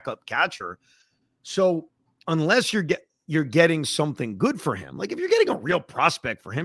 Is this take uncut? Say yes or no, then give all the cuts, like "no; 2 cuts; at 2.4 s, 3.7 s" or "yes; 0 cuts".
yes; 0 cuts